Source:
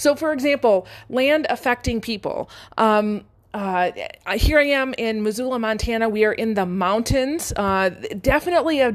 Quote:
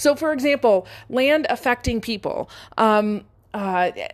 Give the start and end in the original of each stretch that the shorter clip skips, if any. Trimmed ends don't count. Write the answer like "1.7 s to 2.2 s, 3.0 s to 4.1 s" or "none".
none

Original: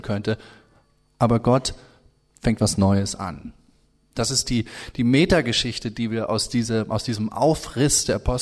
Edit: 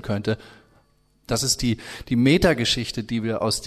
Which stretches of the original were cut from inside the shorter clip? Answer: 1.1 s to 4.0 s

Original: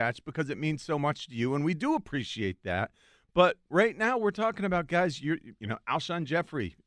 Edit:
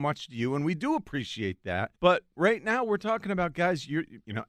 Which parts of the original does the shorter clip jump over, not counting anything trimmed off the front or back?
2.9 s to 3.3 s

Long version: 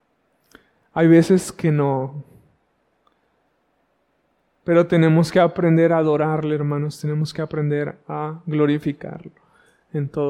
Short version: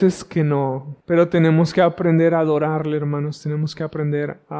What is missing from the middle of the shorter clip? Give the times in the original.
2.3 s to 4.6 s

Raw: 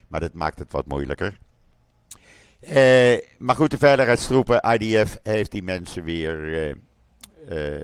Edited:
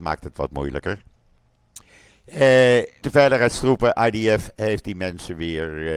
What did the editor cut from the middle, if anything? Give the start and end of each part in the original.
3.4 s to 3.7 s

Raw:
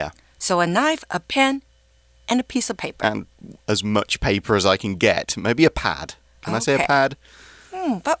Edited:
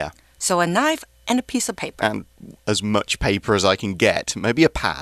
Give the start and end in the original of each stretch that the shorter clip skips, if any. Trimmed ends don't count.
1.1 s to 2.1 s

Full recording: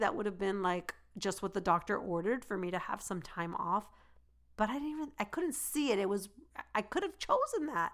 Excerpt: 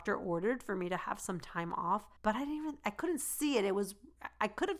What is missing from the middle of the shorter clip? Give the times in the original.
4.0 s to 4.5 s

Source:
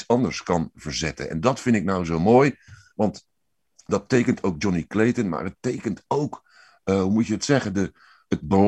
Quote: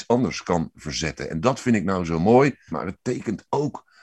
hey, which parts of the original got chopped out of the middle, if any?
2.7 s to 5.3 s

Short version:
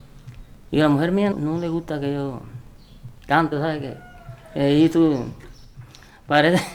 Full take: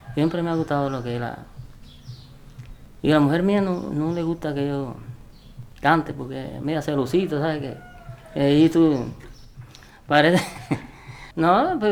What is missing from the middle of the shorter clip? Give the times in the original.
3.6 s to 3.9 s, 6.1 s to 7.3 s

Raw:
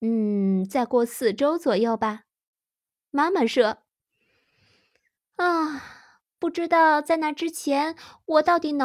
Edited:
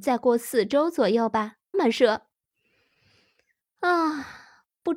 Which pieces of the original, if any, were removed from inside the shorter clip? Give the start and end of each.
2.4 s to 3.3 s

